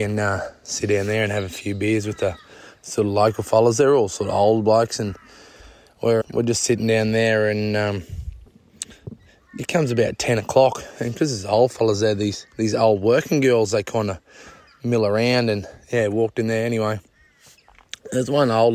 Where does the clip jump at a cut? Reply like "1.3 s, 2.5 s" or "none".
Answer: 6.2 s

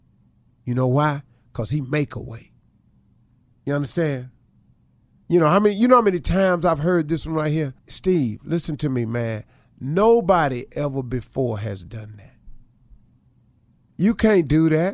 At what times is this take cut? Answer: 7.8 s

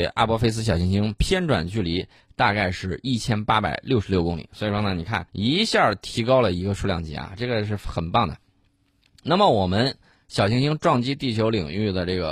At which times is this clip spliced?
5.3 s

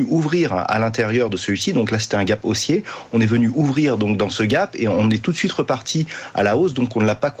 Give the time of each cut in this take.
none

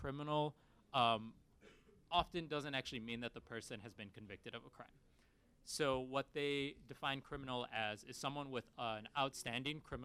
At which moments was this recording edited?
none

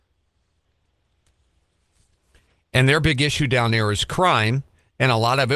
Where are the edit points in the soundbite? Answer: none

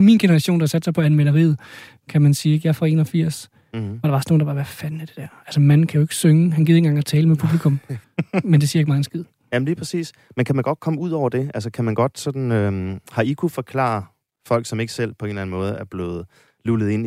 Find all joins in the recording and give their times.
8.0 s

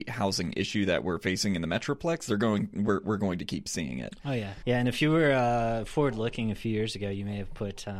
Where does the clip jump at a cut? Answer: 4.6 s

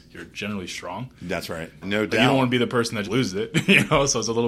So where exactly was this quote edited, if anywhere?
1.8 s, 3.0 s

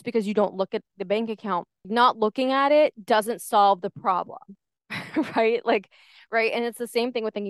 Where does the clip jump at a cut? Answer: 1.8 s

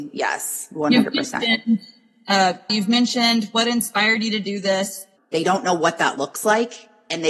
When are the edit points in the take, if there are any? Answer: 2.7 s, 5.2 s

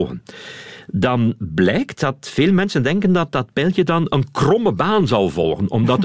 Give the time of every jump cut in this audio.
none

